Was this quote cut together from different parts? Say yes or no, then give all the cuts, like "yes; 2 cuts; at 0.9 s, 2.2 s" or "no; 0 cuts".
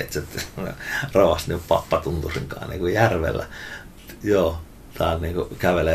no; 0 cuts